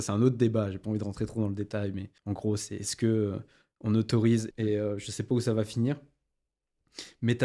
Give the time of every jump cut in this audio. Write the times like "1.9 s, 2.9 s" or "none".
2.2 s, 4.5 s